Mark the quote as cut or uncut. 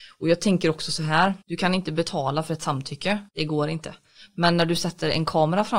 cut